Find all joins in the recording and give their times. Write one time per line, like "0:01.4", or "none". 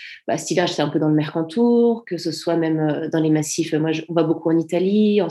none